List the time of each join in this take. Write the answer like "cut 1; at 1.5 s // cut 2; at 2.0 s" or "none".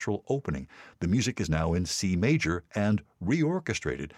none